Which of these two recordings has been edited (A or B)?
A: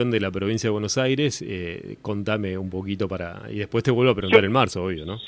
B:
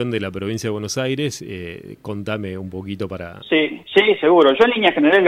B